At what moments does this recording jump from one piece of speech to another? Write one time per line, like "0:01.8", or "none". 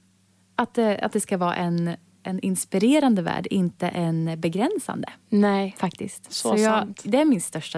none